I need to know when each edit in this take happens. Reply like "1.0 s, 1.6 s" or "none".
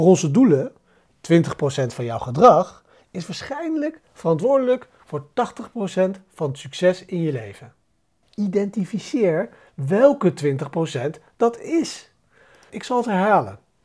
8.2 s, 12.7 s